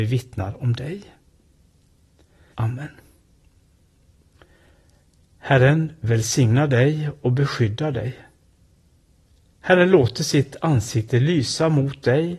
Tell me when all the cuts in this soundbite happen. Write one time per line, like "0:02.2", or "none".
0:02.5